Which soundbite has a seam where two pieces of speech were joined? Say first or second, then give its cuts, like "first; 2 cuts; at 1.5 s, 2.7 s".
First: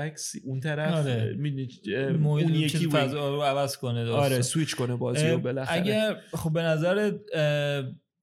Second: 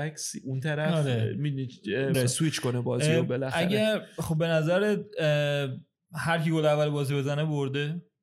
second; 1 cut; at 2.1 s